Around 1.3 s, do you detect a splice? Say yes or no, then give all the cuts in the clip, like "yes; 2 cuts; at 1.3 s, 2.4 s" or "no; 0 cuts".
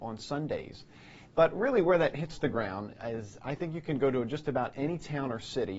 yes; 1 cut; at 1.3 s